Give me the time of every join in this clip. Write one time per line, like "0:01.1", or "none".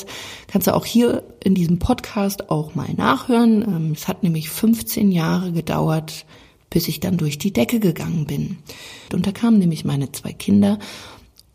0:04.0
0:09.1